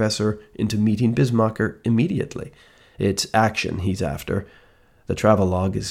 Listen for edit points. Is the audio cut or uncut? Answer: cut